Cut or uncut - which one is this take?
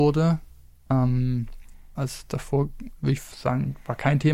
cut